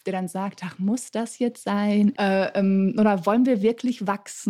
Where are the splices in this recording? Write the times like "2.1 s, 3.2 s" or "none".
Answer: 2.1 s